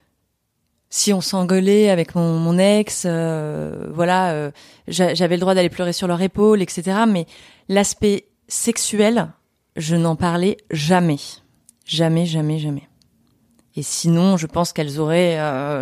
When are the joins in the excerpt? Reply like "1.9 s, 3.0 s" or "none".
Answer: none